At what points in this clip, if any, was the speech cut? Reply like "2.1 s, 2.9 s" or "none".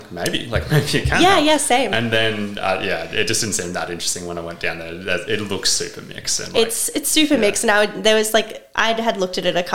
none